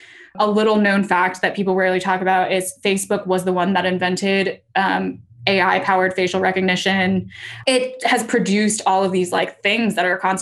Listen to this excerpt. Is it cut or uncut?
uncut